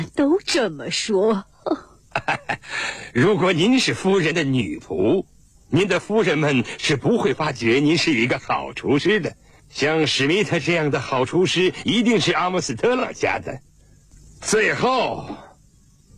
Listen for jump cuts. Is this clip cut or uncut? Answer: uncut